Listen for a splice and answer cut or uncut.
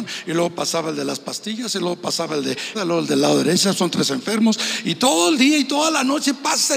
cut